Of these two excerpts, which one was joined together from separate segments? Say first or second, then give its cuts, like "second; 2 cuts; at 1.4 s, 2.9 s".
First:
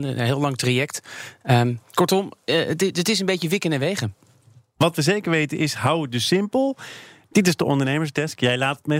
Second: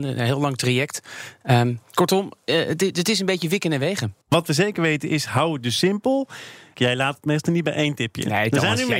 second; 2 cuts; at 4.2 s, 6.7 s